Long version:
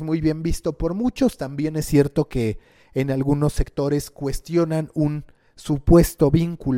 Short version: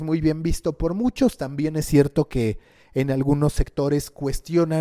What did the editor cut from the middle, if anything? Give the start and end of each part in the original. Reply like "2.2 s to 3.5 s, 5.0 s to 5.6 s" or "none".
none